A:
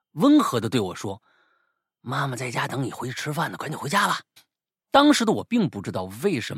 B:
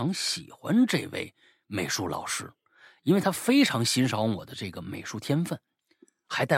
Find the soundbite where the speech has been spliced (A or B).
A